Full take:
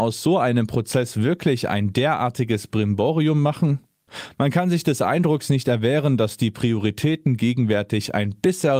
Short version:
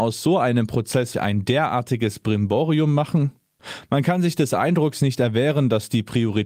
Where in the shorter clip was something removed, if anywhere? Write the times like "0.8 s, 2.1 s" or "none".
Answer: 1.1 s

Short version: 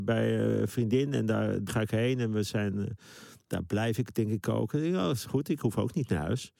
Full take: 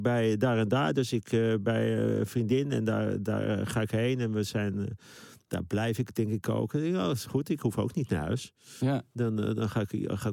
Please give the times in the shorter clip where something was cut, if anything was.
1.7 s

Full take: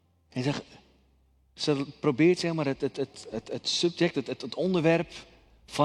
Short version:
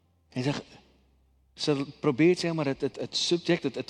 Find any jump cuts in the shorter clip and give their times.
2.9 s

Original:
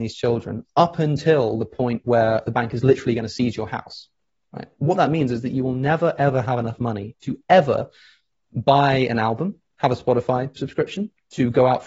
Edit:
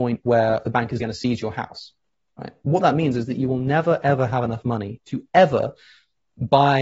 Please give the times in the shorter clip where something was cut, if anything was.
1.0 s

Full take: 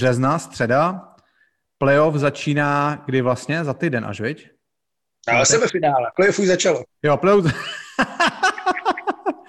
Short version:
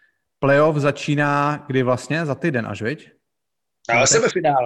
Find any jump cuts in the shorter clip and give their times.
none

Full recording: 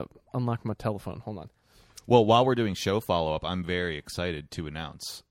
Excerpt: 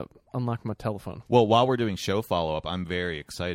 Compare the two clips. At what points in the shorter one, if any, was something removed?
1.2 s

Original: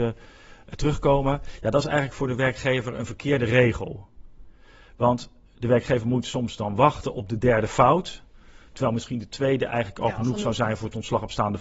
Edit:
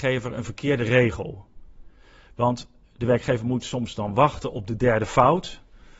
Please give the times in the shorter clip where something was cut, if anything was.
none

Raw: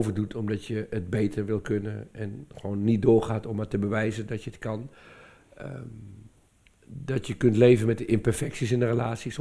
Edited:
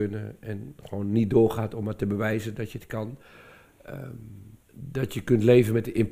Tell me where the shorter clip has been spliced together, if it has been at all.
4.6 s

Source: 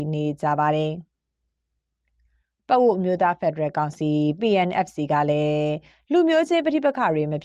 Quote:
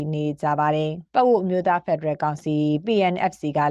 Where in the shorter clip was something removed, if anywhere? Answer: 1.1 s

